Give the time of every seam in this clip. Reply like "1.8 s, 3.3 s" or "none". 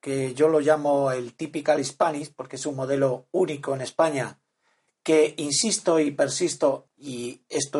6.9 s